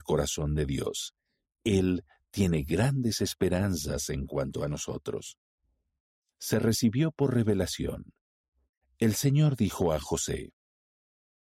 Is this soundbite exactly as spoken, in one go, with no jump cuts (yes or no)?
no